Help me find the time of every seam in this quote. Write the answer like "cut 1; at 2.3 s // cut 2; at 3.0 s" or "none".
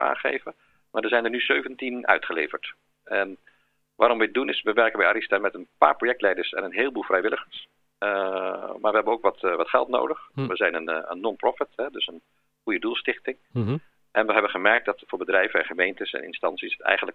none